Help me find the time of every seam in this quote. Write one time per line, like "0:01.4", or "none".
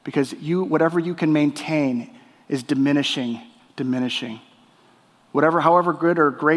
0:03.6